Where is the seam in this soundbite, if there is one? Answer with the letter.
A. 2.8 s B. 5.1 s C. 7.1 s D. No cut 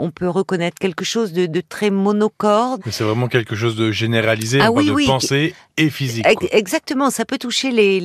A